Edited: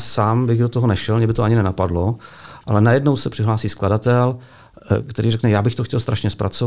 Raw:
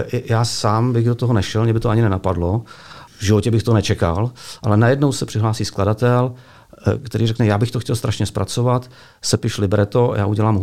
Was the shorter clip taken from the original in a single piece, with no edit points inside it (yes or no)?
no